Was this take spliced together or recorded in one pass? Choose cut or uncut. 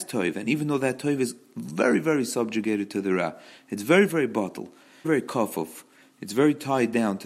cut